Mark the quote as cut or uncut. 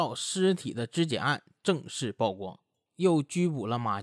cut